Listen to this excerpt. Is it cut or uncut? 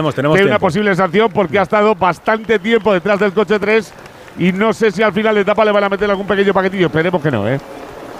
uncut